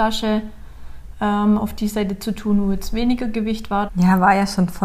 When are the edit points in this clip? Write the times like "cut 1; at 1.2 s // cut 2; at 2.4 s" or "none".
cut 1; at 3.9 s